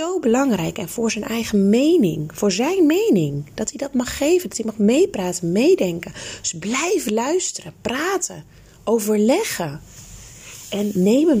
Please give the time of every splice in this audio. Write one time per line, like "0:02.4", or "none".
none